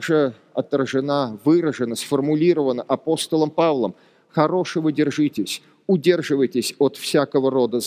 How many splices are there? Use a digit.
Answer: 0